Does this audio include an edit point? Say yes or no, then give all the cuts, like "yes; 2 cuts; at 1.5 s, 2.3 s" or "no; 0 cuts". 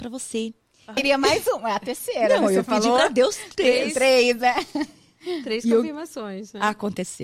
yes; 1 cut; at 1.0 s